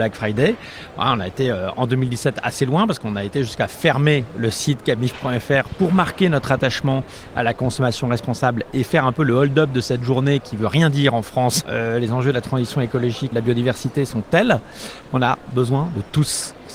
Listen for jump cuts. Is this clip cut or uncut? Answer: cut